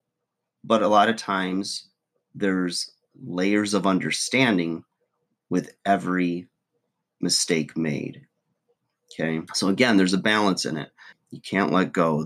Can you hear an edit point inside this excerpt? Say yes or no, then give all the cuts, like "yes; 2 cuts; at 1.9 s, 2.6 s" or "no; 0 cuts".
yes; 2 cuts; at 9.5 s, 11.1 s